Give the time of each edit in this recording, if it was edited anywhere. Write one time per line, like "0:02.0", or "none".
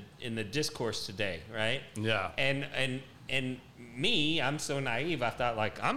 none